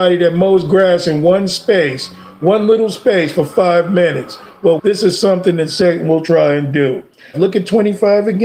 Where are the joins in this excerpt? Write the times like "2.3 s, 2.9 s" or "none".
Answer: 4.8 s, 7.3 s